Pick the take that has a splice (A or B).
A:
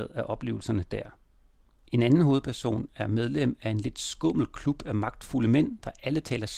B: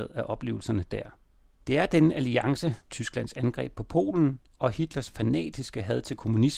B